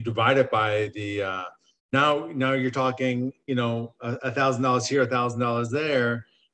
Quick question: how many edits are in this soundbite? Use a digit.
1